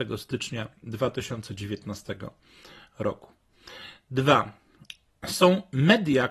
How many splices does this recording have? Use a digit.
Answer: 0